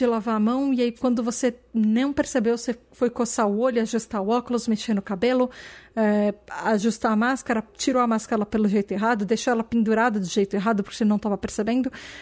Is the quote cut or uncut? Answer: uncut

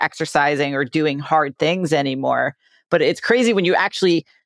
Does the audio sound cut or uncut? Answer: uncut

